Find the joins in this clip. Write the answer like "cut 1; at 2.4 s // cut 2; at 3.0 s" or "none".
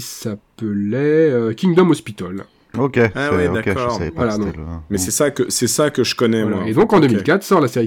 cut 1; at 2.7 s